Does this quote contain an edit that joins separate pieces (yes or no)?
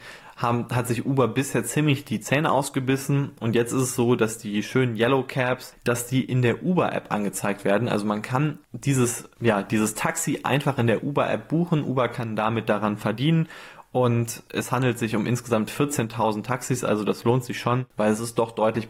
no